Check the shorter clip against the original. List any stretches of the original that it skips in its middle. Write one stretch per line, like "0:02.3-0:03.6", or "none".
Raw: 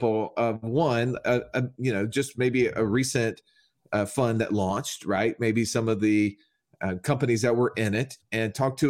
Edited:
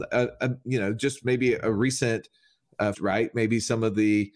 0:04.1-0:05.0